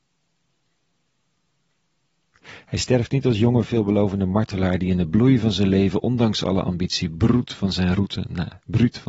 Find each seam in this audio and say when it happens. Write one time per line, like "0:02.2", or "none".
none